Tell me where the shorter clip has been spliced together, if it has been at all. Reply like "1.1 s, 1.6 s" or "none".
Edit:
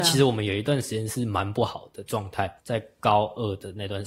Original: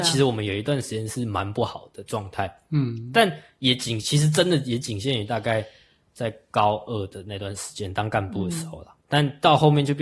2.6 s

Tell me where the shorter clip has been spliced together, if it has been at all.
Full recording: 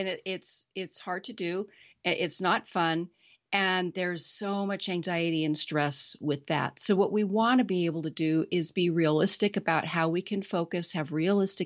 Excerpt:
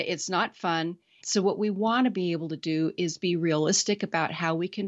1.2 s

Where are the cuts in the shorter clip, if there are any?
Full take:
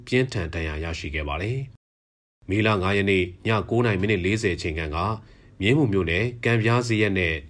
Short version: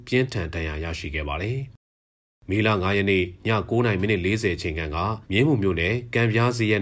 5.2 s

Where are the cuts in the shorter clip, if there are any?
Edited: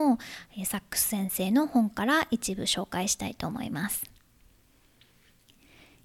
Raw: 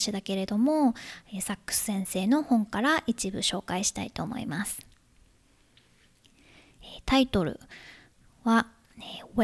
none

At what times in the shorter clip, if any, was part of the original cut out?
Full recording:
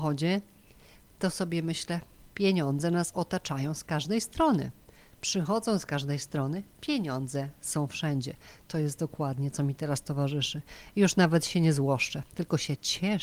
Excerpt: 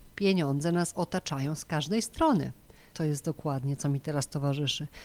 2.9 s

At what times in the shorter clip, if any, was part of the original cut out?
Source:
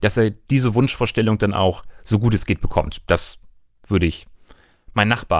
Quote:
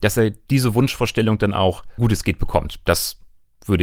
2.0 s

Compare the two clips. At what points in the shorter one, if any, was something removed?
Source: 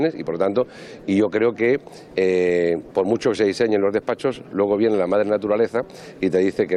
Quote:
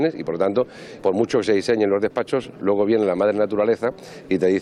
1.0 s

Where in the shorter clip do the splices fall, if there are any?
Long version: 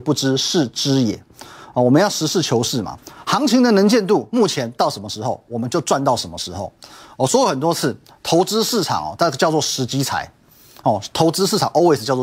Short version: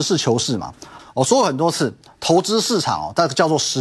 1.0 s

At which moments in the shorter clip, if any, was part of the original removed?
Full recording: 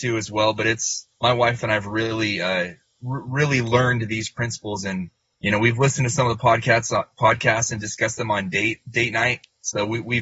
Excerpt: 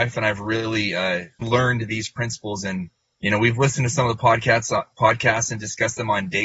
1.4 s

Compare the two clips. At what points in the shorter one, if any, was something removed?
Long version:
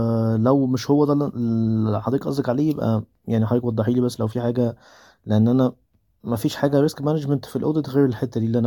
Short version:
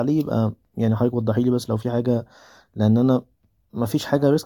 none

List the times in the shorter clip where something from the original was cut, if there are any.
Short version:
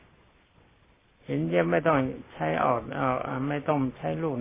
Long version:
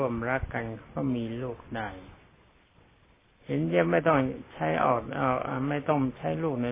none

